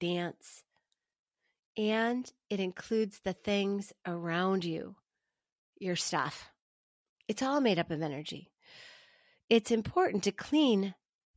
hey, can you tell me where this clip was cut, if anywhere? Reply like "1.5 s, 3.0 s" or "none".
none